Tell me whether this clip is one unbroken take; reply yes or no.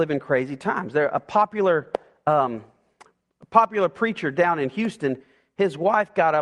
yes